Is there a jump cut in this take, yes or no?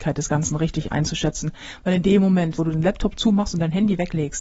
yes